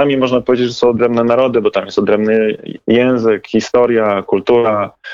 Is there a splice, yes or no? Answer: no